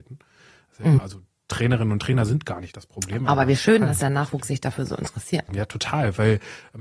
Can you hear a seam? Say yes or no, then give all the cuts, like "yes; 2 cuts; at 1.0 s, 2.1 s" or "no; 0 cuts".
yes; 2 cuts; at 1.0 s, 5.5 s